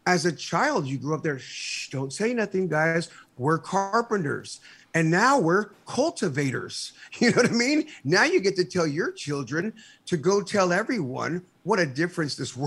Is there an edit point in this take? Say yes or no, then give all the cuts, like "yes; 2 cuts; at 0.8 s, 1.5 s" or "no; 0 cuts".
no; 0 cuts